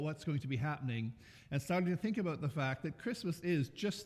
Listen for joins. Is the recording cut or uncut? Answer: uncut